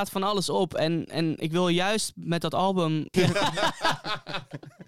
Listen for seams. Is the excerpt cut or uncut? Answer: cut